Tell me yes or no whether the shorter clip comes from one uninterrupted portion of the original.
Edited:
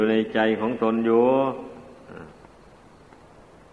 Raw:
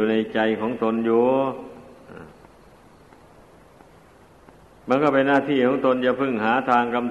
yes